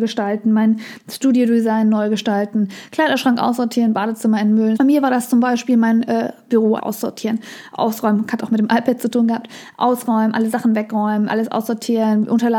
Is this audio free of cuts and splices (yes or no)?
no